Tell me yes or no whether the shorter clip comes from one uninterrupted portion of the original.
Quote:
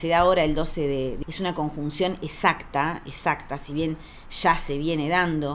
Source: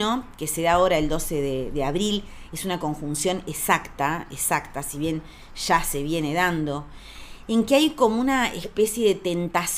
no